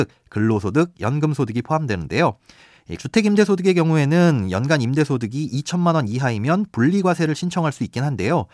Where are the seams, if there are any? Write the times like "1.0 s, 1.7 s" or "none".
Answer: 3.0 s